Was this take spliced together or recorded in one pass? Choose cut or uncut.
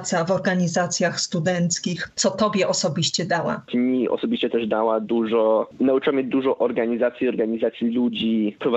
cut